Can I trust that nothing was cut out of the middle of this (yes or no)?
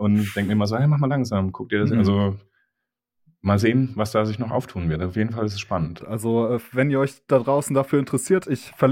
no